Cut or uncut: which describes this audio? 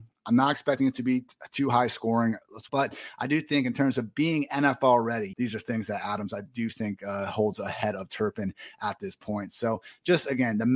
cut